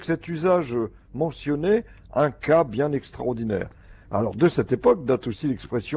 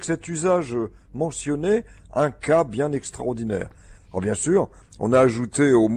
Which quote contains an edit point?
second; 1 cut; at 4.0 s

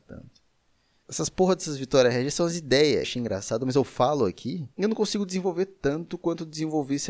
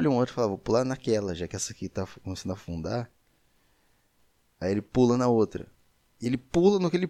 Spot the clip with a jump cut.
first; 3 cuts; at 1.0 s, 3.0 s, 4.7 s

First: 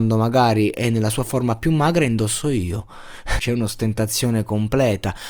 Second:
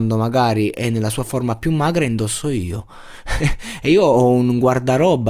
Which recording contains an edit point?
first; 1 cut; at 3.4 s

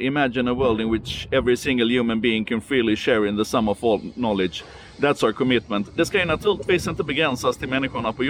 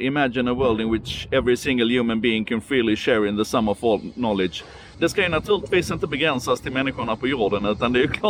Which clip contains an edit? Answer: second; 1 cut; at 4.9 s

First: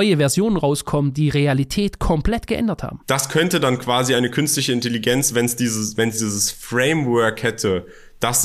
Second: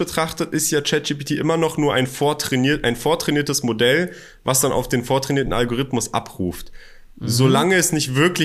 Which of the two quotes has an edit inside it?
first; 1 cut; at 3.0 s

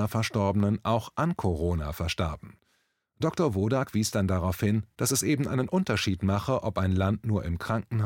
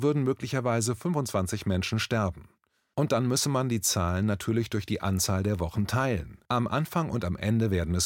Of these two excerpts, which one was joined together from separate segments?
second; 2 cuts; at 2.9 s, 6.5 s

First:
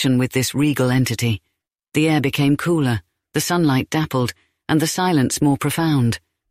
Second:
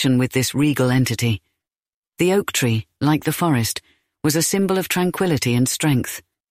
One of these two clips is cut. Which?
first; 1 cut; at 1.8 s

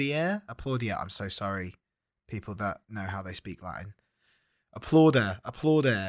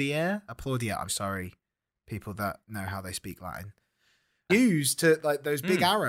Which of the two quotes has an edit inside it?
second; 2 cuts; at 1.1 s, 4.5 s

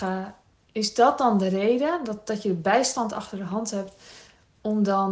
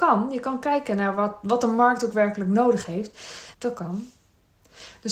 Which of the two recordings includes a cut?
second; 1 cut; at 3.5 s

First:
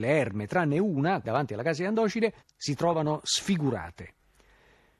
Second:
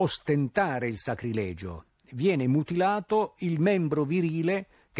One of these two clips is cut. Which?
first; 2 cuts; at 1.2 s, 2.4 s

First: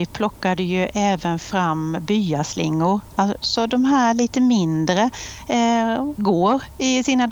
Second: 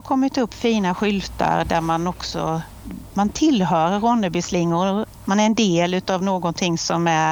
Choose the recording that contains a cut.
first; 1 cut; at 6.2 s

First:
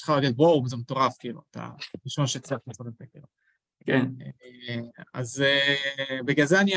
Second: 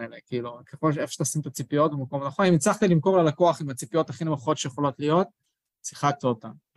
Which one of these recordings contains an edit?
first; 1 cut; at 3.8 s

